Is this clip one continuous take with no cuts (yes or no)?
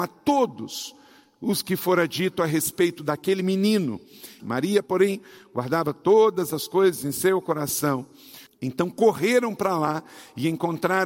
no